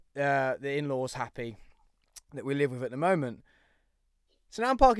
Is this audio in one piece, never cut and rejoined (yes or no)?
yes